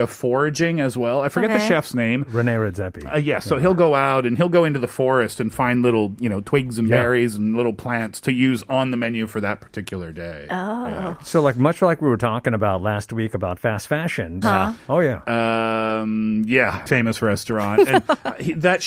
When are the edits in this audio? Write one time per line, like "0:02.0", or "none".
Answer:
0:14.4
0:16.9

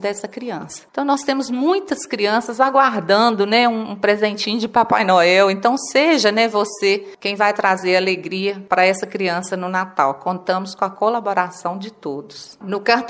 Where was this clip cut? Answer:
none

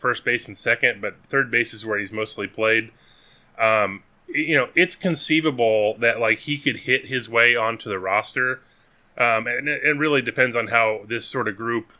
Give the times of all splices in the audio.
none

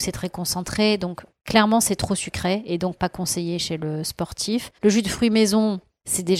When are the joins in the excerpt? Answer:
0:04.8

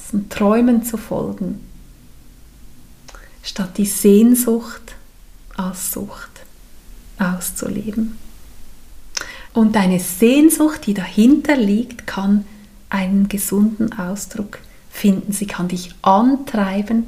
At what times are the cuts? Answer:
0:09.5

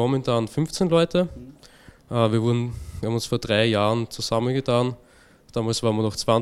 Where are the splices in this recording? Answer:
none

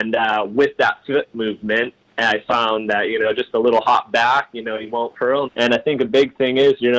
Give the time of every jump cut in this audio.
0:05.4

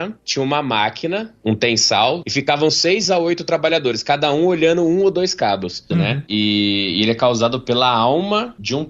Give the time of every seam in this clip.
0:02.2
0:05.9

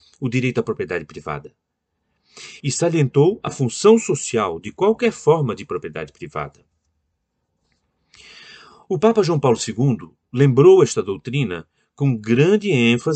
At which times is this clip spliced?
none

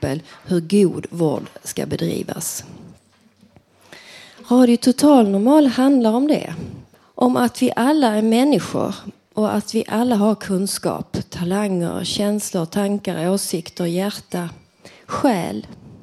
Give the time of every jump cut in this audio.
0:06.9

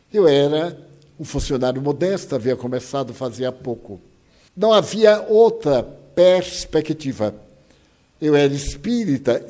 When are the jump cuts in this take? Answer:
0:04.5

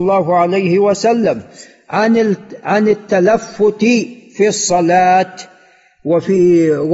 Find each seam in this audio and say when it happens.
none

